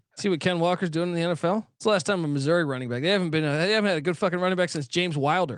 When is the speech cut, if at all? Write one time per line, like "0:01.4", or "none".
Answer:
0:01.7

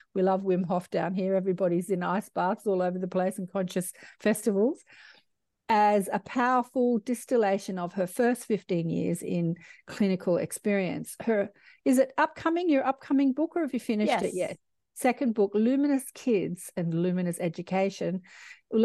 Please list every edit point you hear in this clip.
0:14.9

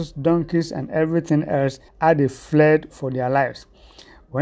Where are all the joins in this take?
0:01.9

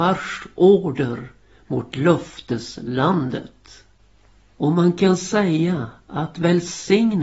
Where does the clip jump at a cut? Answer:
none

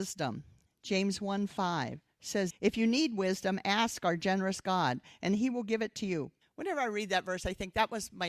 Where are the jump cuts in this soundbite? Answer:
0:02.5
0:06.4

